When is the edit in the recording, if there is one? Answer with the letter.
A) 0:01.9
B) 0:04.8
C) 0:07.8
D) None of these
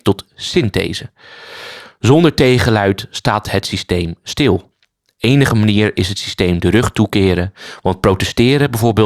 D